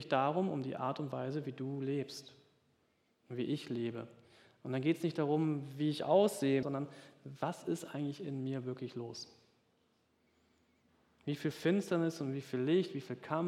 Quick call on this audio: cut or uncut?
cut